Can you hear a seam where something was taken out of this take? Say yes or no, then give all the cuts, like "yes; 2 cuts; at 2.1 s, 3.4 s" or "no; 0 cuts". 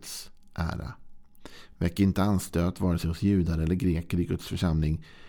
no; 0 cuts